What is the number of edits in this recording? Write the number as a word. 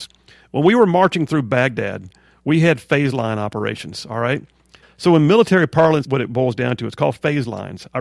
two